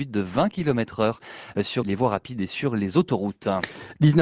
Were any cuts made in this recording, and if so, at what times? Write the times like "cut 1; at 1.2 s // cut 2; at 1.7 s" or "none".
cut 1; at 1.8 s